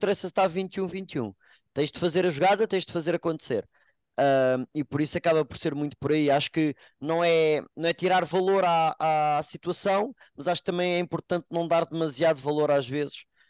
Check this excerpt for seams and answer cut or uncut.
cut